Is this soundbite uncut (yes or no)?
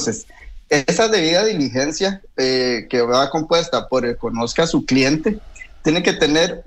yes